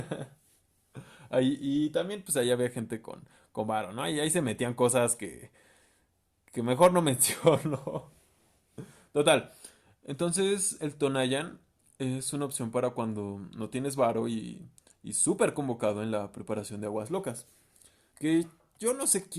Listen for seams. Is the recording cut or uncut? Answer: uncut